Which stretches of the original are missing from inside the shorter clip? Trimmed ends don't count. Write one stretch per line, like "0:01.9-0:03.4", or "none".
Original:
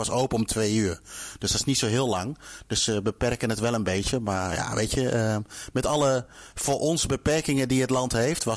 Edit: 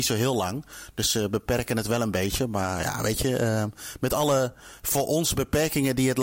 none